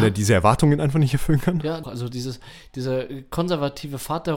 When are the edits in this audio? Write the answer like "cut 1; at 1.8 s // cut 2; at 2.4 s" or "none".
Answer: cut 1; at 1.8 s